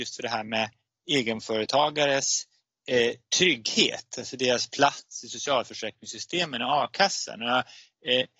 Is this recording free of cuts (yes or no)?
yes